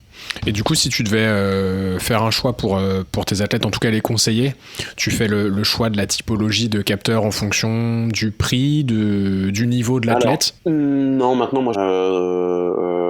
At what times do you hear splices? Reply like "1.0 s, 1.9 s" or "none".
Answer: 10.6 s, 11.7 s